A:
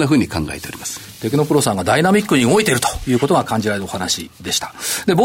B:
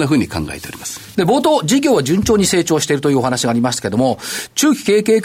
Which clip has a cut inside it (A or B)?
B